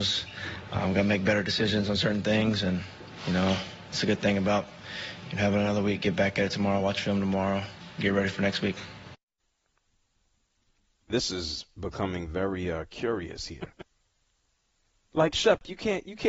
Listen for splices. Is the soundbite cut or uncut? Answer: uncut